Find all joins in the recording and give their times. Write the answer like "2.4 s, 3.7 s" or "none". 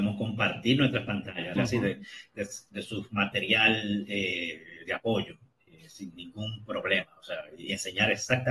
1.6 s